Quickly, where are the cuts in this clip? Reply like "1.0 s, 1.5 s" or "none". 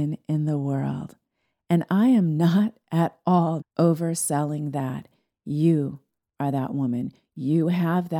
3.6 s